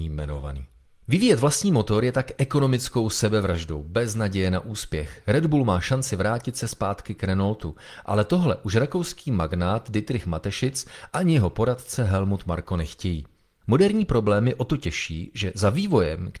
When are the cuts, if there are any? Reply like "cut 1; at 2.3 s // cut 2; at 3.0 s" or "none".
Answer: cut 1; at 13.6 s